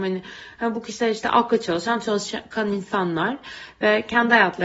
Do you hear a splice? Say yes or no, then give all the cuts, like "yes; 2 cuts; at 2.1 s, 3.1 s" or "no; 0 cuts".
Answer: no; 0 cuts